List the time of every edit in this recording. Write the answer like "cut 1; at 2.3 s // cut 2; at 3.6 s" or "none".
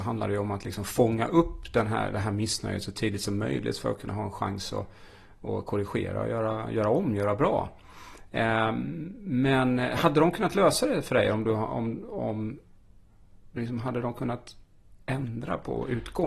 none